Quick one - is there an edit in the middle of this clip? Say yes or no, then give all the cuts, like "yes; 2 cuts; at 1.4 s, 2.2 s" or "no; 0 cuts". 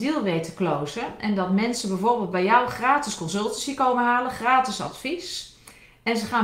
no; 0 cuts